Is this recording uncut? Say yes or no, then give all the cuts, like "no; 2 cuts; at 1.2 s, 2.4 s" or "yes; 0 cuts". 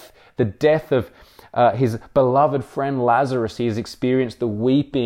yes; 0 cuts